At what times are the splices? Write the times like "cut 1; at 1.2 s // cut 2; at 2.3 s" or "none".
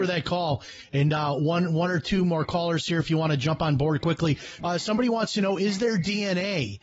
cut 1; at 4.6 s